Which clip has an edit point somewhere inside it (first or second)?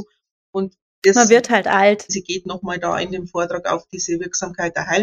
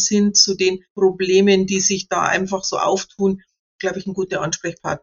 first